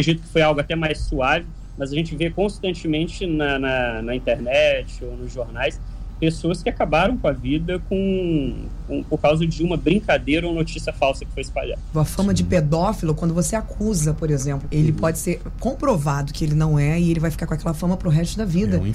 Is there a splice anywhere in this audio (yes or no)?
yes